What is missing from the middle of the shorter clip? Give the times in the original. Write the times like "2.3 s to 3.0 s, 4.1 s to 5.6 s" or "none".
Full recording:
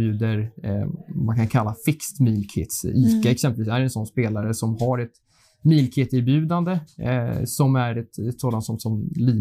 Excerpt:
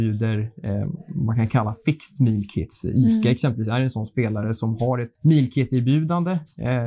5.1 s to 5.6 s